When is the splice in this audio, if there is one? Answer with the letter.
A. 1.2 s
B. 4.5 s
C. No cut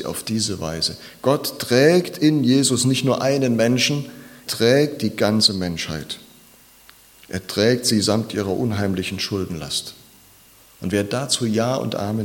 B